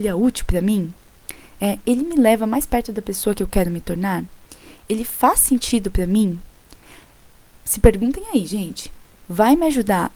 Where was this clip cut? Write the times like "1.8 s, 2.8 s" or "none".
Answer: none